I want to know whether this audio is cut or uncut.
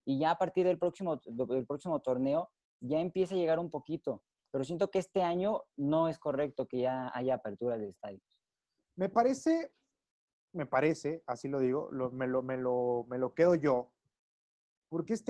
cut